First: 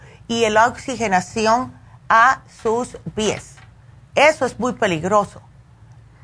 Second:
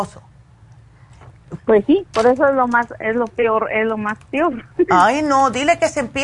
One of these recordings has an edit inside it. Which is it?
second; 2 cuts; at 1.6 s, 4.9 s

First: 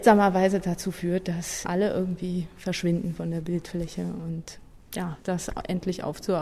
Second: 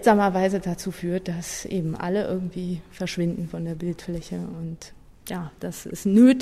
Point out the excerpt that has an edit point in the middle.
first; 2 cuts; at 1.6 s, 5.2 s

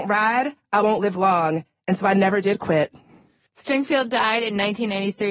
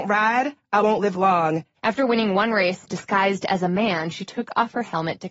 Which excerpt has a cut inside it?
second; 1 cut; at 1.7 s

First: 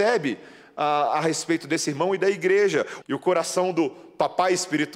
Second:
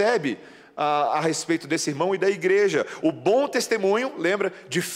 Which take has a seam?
first; 1 cut; at 3.0 s

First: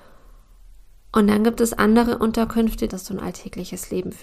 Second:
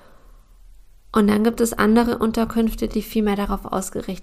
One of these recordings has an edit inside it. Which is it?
first; 1 cut; at 2.9 s

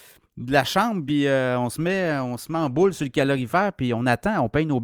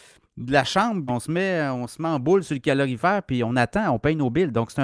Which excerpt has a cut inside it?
second; 1 cut; at 1.1 s

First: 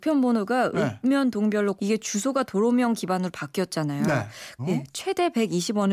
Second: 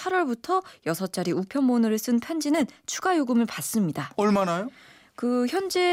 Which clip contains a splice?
first; 2 cuts; at 1.8 s, 4.6 s

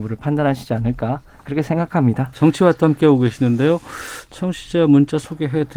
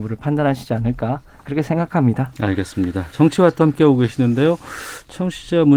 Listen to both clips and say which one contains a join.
first; 1 cut; at 2.3 s

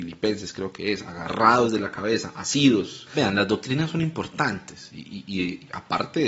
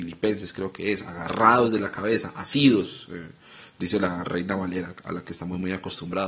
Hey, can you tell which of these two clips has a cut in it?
first; 1 cut; at 3.1 s

